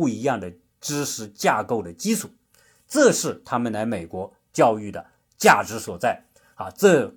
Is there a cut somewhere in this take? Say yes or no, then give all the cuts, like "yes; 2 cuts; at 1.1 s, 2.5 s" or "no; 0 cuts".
no; 0 cuts